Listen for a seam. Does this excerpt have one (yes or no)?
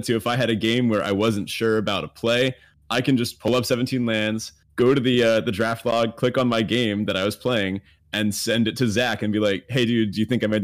no